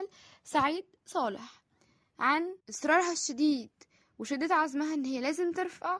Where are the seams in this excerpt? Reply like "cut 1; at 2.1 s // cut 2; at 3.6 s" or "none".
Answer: cut 1; at 2.6 s